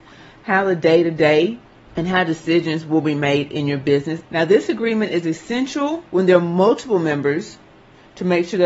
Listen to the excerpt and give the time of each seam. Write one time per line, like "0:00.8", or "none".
0:04.2
0:06.1